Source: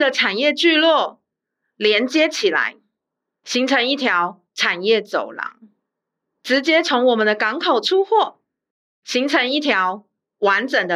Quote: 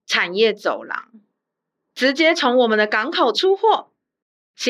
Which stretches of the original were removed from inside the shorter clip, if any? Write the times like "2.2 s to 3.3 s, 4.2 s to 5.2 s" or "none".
none

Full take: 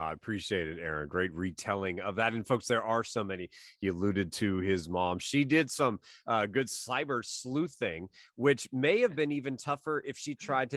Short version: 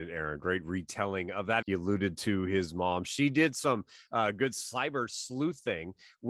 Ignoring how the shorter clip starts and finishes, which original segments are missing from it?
2.3 s to 3.8 s

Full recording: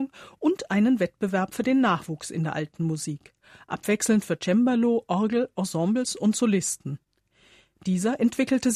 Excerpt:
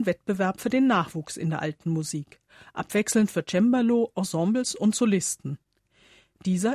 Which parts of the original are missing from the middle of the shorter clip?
5.0 s to 5.5 s

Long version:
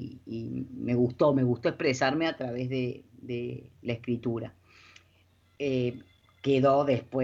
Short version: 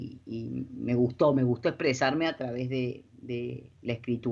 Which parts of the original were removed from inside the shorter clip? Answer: none

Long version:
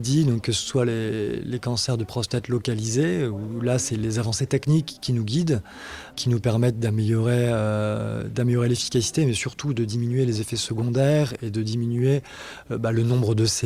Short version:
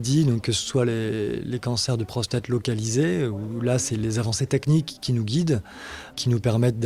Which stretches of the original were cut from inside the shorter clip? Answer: none

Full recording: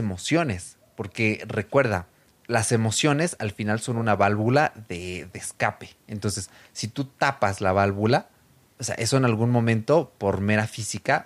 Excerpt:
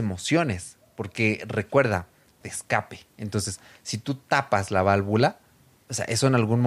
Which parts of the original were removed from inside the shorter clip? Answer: 2.4 s to 5.3 s

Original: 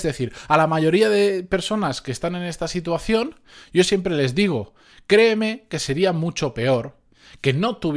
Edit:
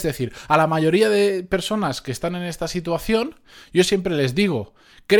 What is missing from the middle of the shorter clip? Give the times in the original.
none

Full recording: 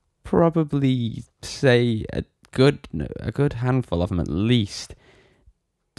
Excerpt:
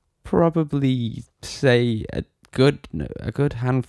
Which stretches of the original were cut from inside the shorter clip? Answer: none

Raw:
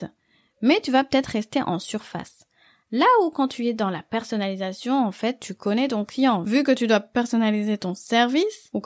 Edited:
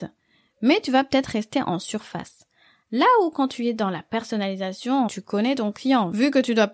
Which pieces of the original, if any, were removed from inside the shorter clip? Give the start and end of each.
5.1 s to 5.4 s

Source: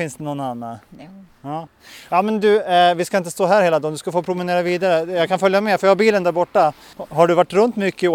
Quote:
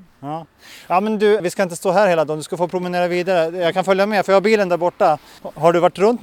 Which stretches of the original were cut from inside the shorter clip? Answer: 2.6 s to 2.9 s

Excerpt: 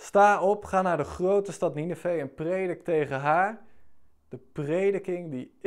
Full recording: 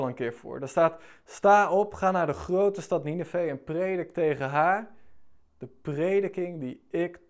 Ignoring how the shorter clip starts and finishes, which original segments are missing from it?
none

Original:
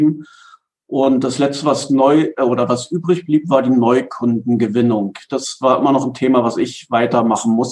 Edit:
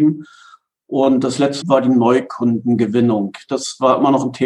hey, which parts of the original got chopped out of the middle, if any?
1.6 s to 3.4 s

